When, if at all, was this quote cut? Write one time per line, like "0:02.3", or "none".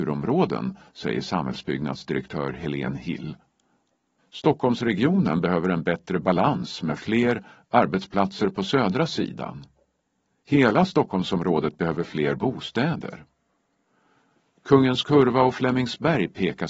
0:04.2